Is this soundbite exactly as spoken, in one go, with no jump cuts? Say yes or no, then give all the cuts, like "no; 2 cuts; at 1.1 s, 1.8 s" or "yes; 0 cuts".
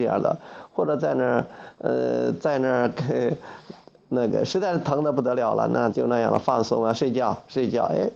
no; 1 cut; at 5.9 s